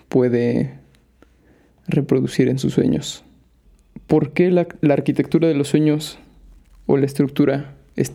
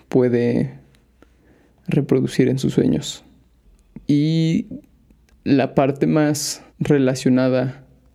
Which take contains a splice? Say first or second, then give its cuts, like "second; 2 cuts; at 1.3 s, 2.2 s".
second; 2 cuts; at 4.0 s, 6.7 s